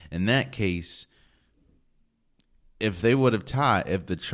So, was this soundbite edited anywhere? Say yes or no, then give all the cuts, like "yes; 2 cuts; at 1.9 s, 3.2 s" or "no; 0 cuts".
no; 0 cuts